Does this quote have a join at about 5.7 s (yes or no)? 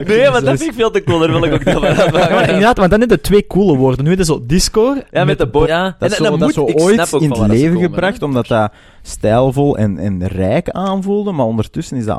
yes